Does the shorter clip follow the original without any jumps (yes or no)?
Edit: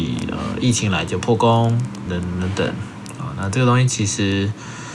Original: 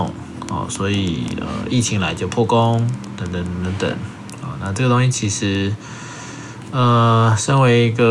no